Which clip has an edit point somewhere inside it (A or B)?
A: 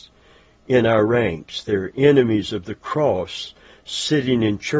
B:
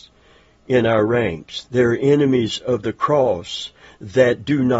B